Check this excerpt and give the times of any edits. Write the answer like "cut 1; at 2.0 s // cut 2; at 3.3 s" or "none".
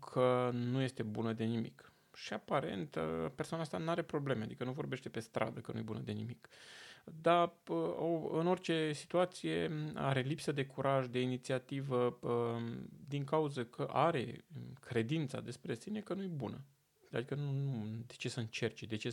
cut 1; at 17.1 s